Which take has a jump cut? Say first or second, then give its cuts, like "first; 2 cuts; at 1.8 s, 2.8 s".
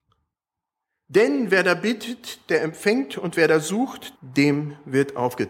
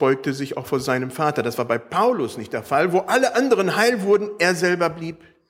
first; 1 cut; at 4.1 s